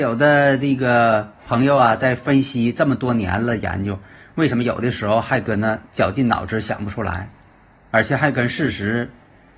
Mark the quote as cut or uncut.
cut